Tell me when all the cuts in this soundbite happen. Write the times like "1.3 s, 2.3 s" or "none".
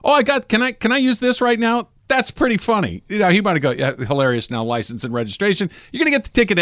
none